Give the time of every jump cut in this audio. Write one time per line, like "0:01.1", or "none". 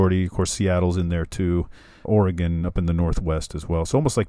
0:02.0